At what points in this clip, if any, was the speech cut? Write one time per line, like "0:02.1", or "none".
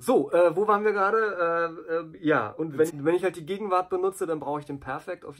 0:02.9